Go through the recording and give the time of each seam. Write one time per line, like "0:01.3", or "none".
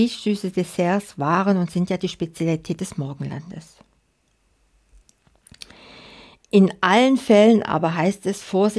none